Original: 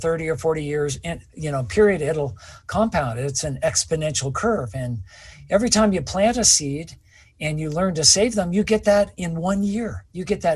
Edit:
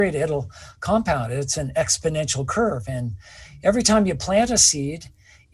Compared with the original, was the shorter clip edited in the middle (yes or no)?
no